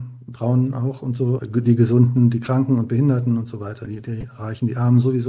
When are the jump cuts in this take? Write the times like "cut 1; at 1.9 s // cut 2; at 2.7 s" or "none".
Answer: cut 1; at 1.4 s